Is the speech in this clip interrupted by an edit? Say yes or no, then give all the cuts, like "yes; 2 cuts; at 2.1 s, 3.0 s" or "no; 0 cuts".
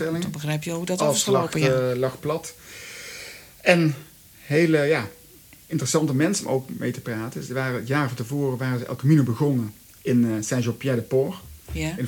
no; 0 cuts